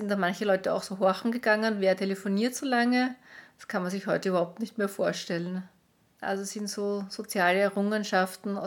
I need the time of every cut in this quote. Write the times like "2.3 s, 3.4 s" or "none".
6.2 s